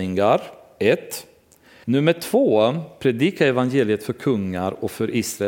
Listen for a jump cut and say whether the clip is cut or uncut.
cut